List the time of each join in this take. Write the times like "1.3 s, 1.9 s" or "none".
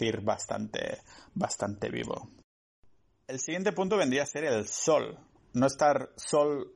none